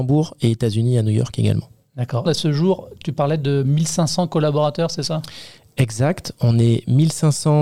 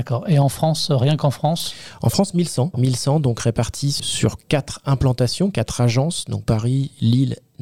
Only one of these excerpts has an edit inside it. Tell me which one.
first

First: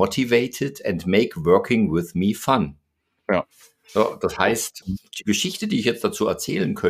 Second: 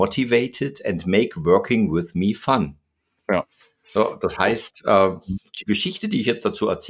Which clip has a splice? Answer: first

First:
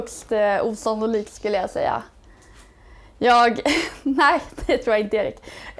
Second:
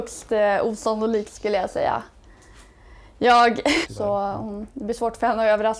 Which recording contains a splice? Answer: second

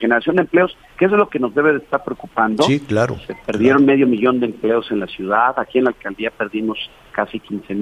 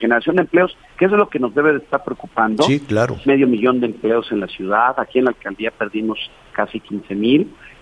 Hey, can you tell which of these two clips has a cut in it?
second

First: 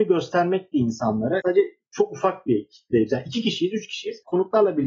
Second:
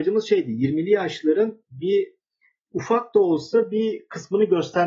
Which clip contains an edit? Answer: first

